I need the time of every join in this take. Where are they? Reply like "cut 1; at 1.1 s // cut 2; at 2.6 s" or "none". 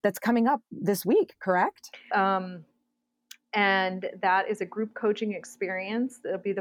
cut 1; at 2.1 s